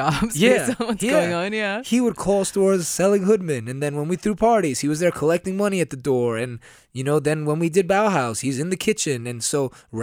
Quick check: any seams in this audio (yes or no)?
no